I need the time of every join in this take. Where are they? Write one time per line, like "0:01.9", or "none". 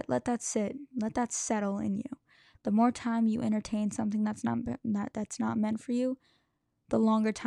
none

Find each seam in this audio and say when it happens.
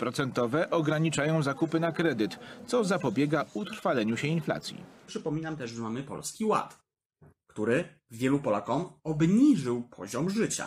0:05.1

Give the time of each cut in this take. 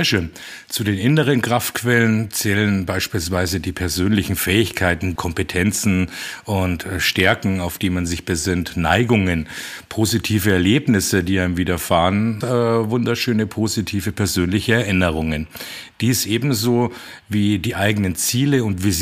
0:05.2
0:12.4

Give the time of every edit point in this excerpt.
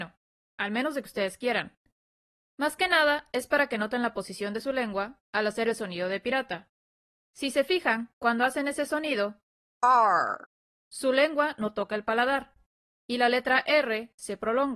none

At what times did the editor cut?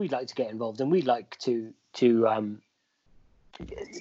none

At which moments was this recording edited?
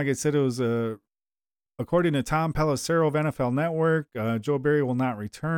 none

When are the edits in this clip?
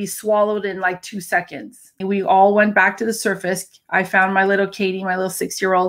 0:02.0

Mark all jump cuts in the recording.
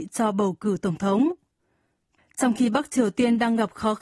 0:02.2

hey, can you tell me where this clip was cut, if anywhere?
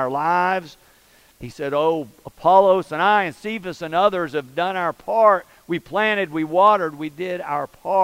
0:01.3

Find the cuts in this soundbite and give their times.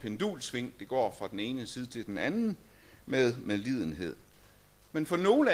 none

